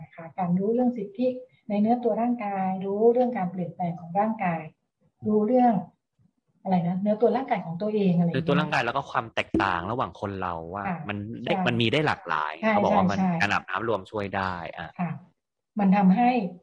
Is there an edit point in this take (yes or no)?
no